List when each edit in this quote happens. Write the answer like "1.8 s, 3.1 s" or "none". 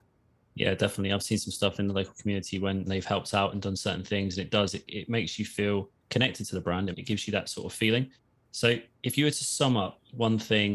6.9 s